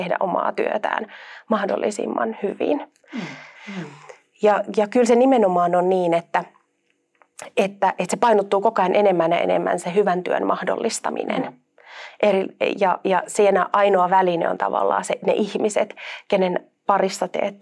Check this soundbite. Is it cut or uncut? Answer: cut